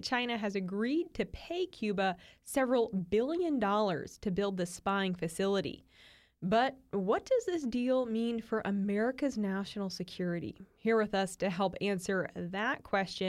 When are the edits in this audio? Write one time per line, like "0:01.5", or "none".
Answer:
none